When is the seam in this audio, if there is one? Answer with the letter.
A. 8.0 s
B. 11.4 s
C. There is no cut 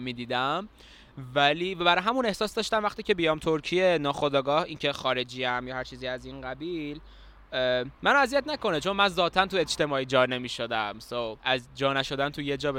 B